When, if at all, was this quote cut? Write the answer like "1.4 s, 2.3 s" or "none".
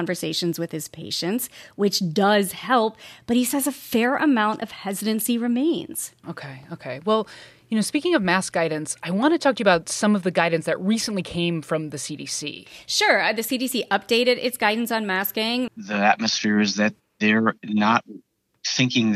6.2 s, 15.7 s